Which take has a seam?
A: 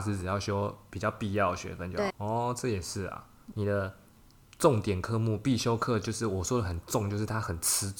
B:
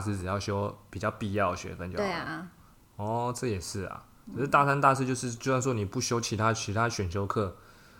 A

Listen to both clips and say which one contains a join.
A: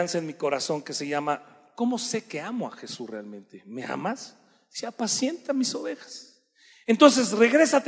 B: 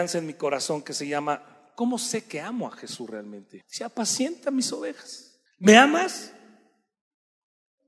B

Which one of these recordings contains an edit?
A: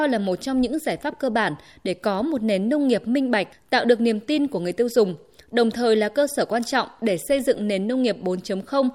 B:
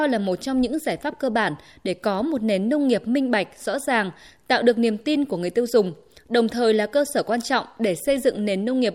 A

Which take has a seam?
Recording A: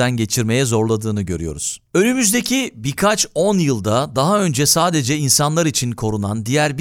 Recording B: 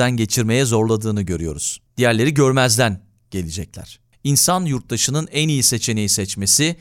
B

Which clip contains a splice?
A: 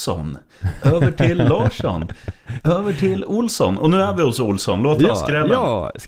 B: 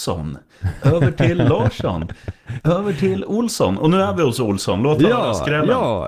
A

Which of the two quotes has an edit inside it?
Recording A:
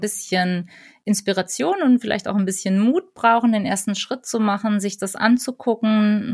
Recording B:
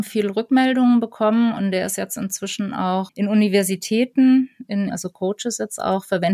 B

